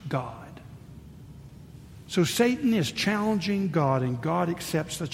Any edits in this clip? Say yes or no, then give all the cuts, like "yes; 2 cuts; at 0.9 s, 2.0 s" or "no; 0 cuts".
no; 0 cuts